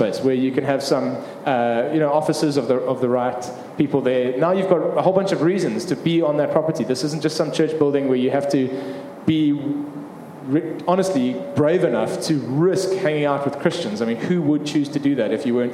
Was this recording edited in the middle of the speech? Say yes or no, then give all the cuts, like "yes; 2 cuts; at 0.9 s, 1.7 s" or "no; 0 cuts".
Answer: no; 0 cuts